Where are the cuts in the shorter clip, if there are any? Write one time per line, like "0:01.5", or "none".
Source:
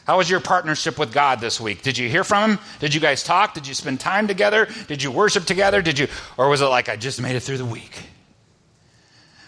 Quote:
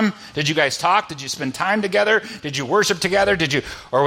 none